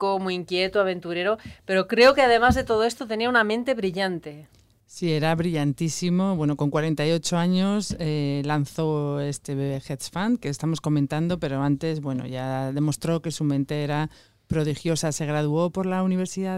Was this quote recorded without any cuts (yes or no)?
yes